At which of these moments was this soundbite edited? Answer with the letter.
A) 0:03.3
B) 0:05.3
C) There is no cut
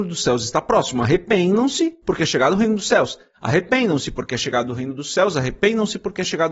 A